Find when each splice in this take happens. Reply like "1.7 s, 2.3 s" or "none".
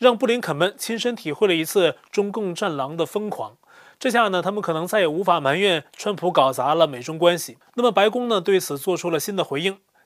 7.7 s